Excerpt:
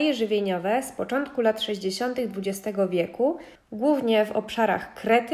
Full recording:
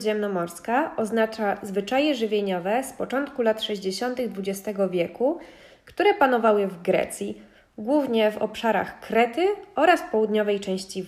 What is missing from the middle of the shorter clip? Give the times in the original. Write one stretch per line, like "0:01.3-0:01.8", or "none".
0:05.6-0:07.6